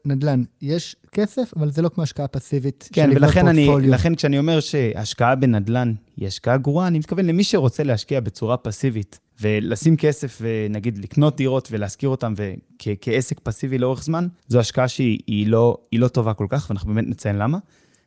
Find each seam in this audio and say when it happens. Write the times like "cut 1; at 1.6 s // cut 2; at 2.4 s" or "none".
cut 1; at 9.3 s // cut 2; at 14.4 s